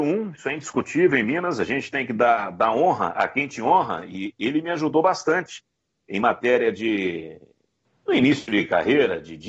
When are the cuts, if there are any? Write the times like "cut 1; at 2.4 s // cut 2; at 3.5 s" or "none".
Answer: none